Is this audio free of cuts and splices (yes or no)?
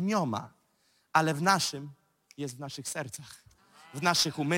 yes